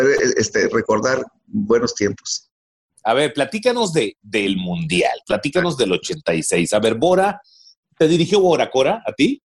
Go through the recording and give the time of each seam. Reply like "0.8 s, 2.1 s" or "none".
none